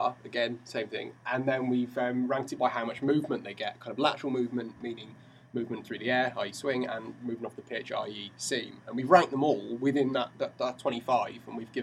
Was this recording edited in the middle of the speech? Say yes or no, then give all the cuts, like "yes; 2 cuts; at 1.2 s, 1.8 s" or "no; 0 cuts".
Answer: no; 0 cuts